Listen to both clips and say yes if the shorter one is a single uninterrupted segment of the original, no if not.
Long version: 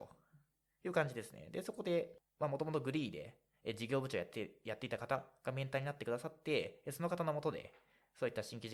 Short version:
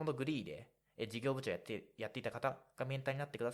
yes